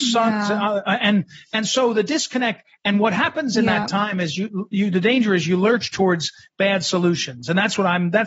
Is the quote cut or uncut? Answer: uncut